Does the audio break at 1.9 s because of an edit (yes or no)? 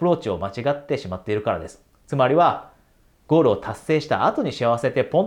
no